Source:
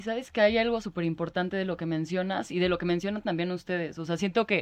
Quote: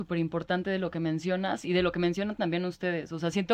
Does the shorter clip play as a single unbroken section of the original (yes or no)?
yes